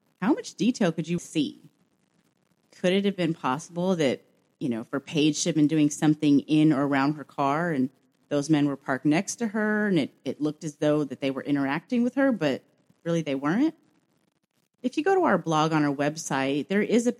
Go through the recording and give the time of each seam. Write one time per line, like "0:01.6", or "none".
0:01.2

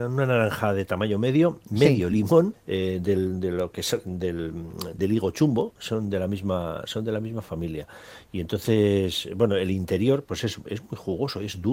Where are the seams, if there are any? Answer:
0:02.5
0:05.0

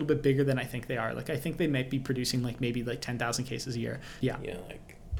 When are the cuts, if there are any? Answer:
0:04.2

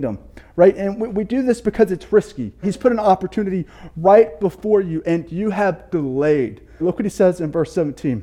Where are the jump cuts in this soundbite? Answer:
0:02.6
0:06.8

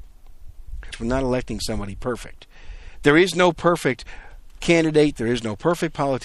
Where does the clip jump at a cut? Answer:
0:00.9

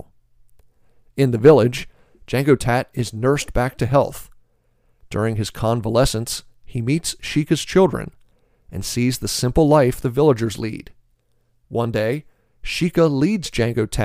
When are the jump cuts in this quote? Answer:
none

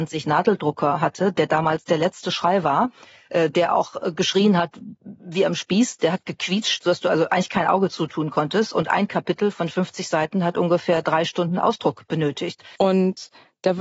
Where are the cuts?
0:12.8

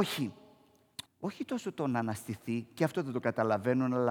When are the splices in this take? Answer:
0:01.1

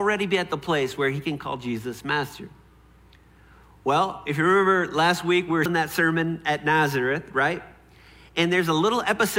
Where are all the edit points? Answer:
0:05.7

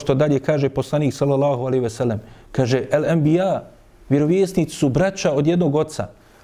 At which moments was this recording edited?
none

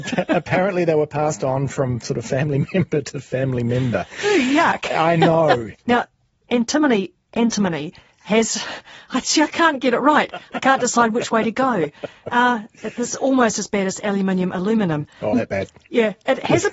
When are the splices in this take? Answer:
0:05.7
0:15.3

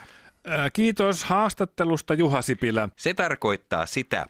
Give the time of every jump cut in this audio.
0:02.9

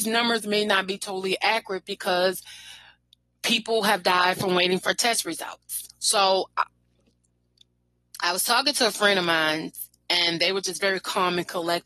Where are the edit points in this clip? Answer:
0:05.9

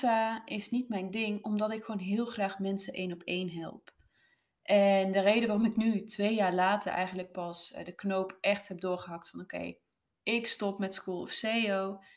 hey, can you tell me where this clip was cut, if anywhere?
none

